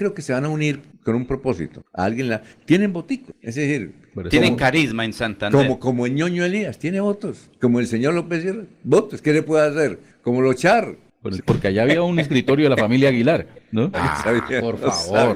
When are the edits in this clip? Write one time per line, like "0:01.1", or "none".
0:11.4
0:13.9